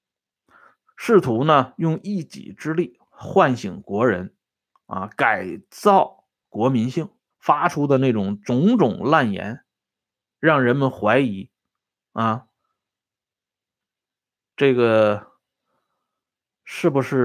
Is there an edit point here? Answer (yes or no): yes